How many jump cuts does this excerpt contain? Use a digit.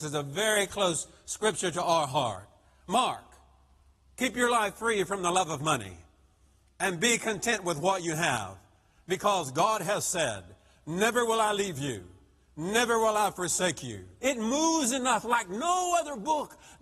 1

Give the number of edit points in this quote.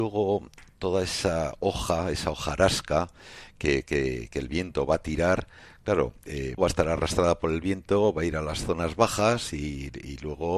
1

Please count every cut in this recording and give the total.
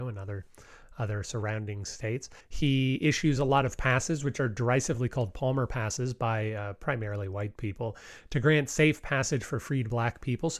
1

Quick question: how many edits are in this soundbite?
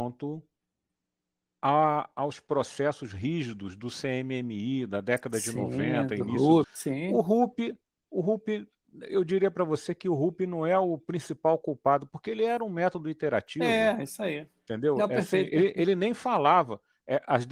1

